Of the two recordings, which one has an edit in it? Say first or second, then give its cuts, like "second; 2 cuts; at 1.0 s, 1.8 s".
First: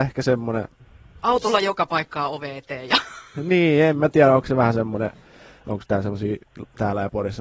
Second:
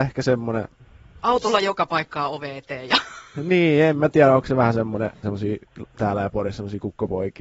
second; 1 cut; at 5.2 s